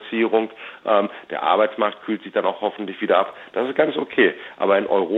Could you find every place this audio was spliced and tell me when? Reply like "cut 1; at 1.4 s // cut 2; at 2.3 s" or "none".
none